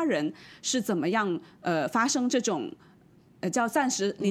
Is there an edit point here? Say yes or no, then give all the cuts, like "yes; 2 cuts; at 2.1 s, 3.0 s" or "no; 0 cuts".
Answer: no; 0 cuts